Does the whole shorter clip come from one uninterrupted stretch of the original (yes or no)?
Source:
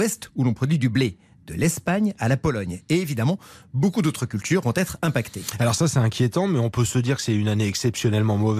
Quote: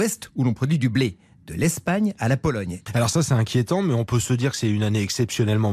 no